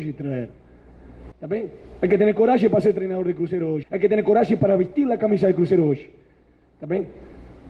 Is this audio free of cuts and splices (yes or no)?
no